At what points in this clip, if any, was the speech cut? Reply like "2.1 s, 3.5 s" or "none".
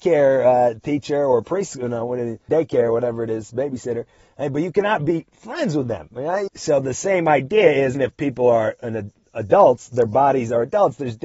2.5 s, 6.5 s, 7.9 s

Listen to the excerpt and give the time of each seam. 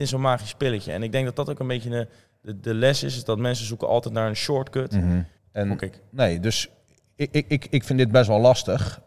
5.4 s

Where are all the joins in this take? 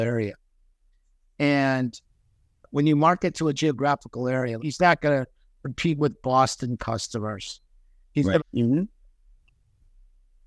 4.6 s, 8.4 s

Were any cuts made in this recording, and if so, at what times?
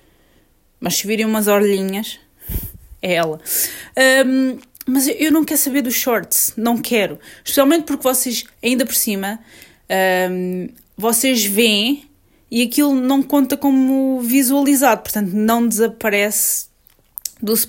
none

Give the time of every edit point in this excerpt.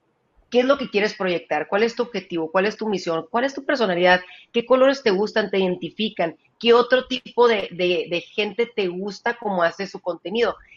none

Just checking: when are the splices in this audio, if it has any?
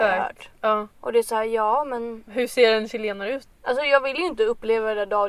0.9 s, 3.5 s

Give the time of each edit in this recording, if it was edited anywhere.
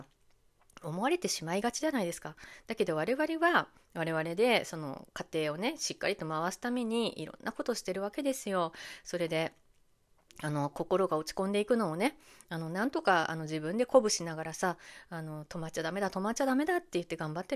none

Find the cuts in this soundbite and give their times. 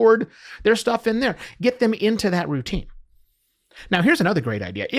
none

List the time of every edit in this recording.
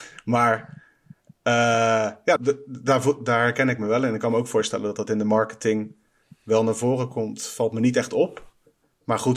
2.4 s

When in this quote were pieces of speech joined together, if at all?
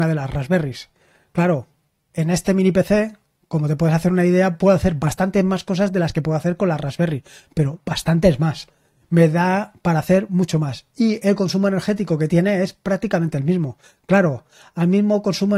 none

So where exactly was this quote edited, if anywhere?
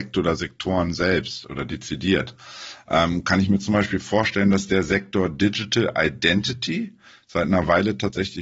none

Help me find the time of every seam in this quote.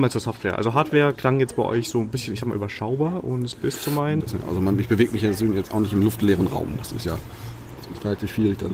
4.2 s

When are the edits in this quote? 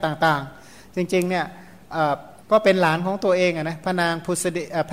2.4 s

